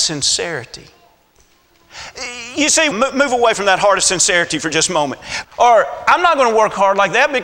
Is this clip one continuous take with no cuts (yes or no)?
no